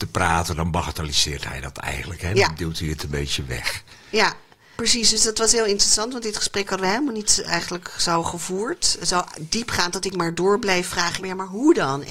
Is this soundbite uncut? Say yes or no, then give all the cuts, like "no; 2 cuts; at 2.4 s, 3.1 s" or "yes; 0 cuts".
no; 2 cuts; at 4.8 s, 11.2 s